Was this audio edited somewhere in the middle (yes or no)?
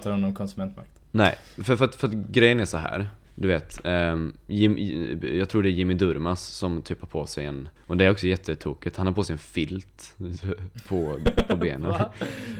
yes